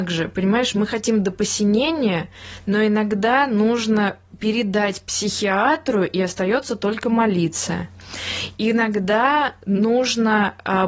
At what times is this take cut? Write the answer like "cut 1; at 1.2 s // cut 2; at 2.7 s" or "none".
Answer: none